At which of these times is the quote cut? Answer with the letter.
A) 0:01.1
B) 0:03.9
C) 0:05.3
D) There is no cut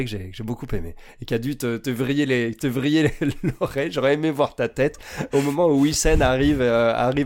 D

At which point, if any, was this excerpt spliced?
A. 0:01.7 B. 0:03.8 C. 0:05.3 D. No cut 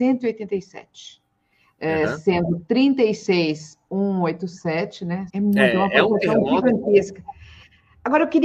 C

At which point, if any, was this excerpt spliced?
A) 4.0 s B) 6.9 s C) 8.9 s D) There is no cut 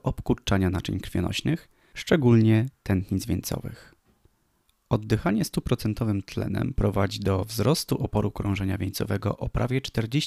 D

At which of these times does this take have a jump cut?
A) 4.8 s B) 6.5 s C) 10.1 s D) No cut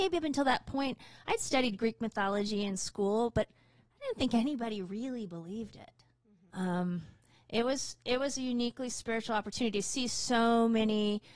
B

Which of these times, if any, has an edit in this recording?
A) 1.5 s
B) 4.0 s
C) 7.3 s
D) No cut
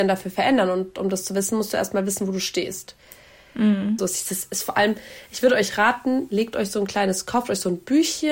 B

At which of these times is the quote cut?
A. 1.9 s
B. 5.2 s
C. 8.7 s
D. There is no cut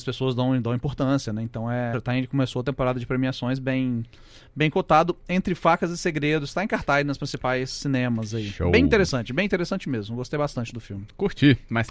A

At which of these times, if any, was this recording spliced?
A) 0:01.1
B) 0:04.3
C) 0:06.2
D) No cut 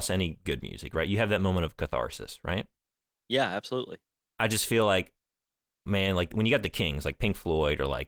B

